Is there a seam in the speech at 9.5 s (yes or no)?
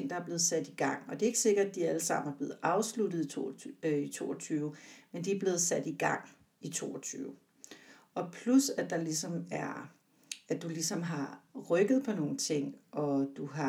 no